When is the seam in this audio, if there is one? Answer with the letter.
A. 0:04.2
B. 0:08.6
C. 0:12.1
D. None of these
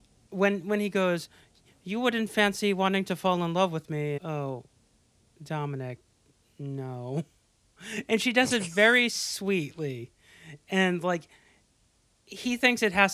A